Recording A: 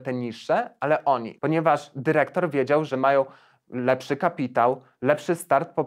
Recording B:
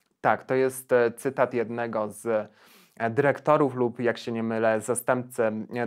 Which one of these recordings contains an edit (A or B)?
A